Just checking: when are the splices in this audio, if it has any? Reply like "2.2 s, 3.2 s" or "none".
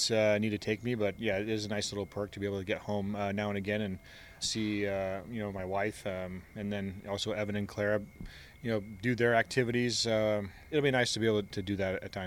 4.4 s, 10.7 s